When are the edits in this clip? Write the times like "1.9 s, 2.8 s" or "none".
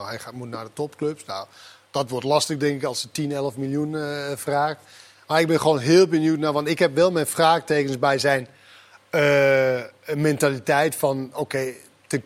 none